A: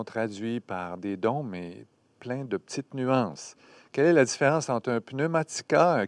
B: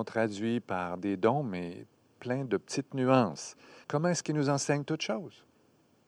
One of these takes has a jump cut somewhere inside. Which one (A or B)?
B